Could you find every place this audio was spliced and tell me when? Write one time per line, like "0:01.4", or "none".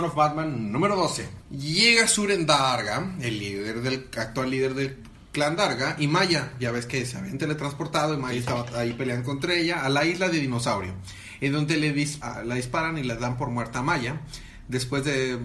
none